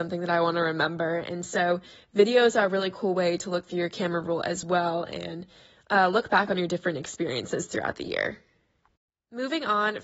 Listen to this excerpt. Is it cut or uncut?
uncut